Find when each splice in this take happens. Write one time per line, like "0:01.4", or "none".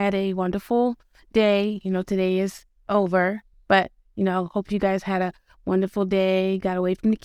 none